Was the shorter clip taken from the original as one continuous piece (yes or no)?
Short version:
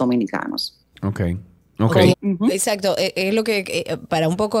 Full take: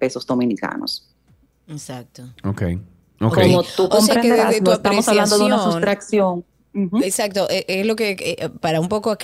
no